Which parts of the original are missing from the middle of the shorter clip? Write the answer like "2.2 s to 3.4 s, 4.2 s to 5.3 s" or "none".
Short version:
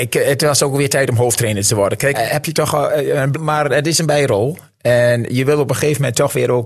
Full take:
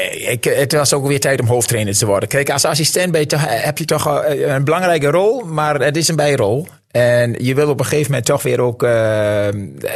2.4 s to 3.5 s, 4.7 s to 5.4 s